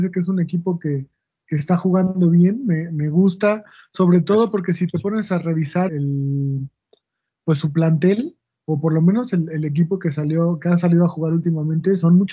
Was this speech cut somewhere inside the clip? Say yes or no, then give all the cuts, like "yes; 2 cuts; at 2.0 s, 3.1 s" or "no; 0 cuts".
yes; 1 cut; at 5.9 s